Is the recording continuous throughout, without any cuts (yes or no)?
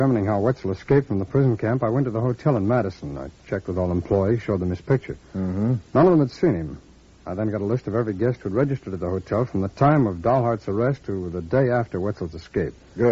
yes